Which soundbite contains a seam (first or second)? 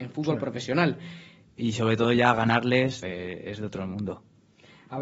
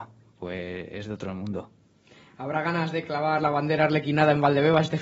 first